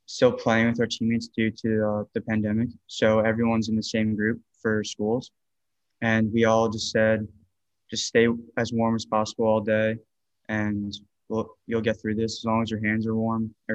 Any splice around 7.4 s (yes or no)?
no